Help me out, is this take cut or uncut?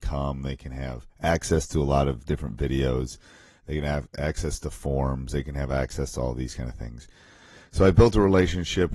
uncut